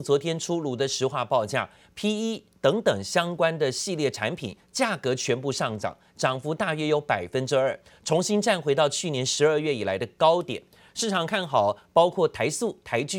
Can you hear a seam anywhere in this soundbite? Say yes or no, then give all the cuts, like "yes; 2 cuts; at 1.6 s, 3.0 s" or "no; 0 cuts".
no; 0 cuts